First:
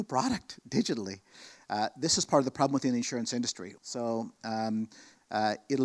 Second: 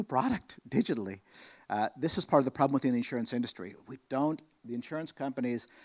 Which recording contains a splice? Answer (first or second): first